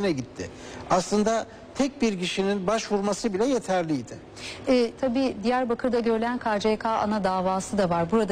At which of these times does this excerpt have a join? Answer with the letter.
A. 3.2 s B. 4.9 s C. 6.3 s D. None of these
B